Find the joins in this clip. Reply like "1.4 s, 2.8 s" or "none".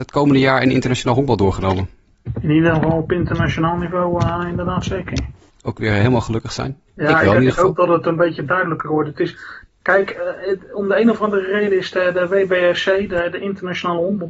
5.5 s, 6.9 s